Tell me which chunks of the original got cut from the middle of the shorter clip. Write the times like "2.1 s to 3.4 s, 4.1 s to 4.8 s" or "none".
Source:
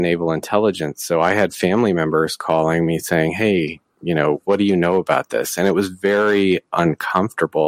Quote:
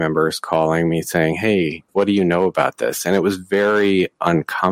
3.9 s to 4.4 s